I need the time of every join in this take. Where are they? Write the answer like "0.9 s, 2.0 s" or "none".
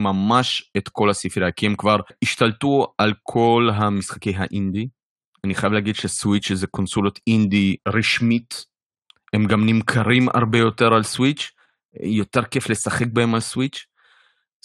none